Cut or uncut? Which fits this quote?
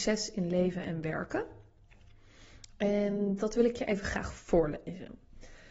uncut